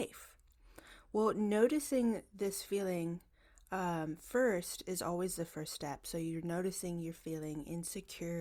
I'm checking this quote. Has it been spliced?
no; 0 cuts

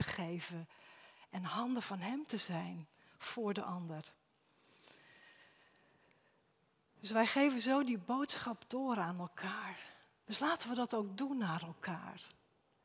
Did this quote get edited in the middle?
yes; 1 cut; at 10.3 s

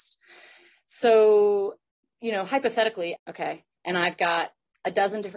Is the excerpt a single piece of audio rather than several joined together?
no; 1 cut; at 3.2 s

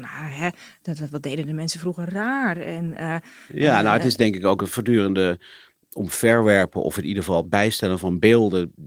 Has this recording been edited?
no; 0 cuts

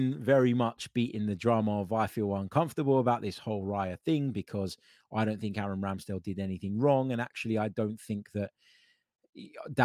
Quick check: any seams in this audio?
no; 0 cuts

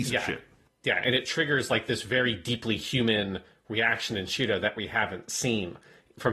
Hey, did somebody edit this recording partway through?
no; 0 cuts

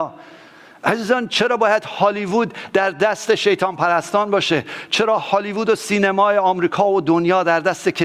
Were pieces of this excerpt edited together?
no; 0 cuts

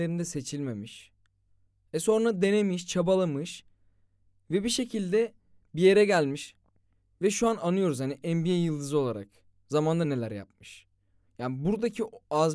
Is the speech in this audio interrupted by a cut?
yes; 1 cut; at 10.0 s

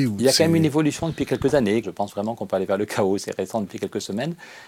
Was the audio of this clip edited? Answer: yes; 1 cut; at 1.8 s

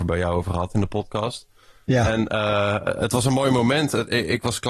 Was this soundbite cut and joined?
no; 0 cuts

